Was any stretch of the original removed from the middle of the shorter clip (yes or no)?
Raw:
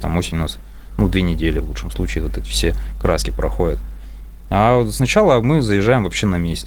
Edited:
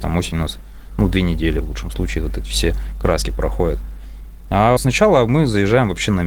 yes